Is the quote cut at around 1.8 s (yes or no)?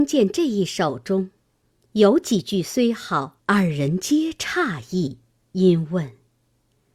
no